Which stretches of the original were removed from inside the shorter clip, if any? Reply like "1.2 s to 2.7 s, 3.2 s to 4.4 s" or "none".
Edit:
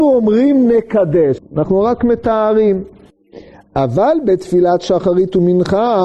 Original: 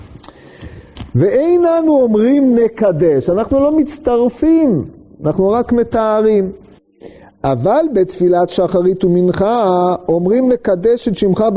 3.2 s to 5.1 s